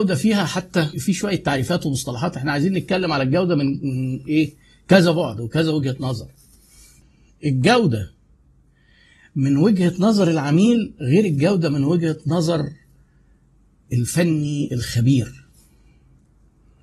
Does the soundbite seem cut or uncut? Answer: cut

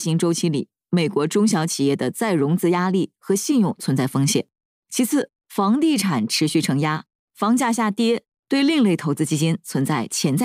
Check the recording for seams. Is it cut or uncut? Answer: uncut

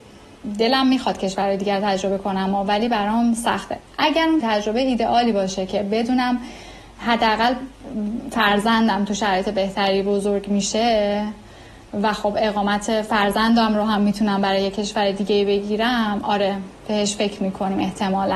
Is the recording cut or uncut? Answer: cut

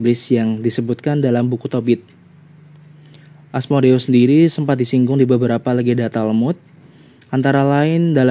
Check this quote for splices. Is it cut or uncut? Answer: uncut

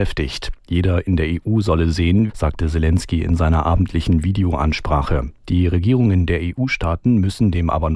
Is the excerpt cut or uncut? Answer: cut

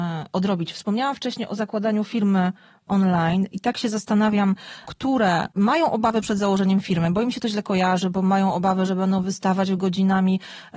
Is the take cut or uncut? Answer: cut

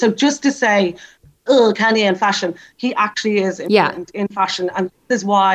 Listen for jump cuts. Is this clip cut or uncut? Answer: cut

